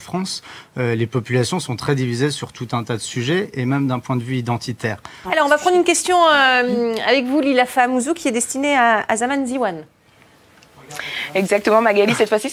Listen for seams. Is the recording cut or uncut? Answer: cut